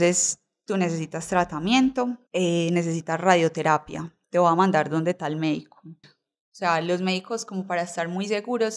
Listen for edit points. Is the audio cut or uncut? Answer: cut